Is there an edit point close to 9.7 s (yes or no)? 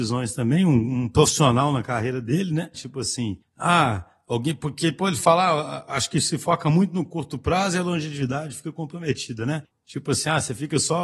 yes